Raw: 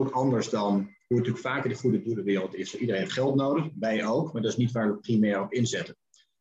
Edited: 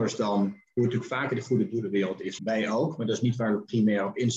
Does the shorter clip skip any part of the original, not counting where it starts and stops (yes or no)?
yes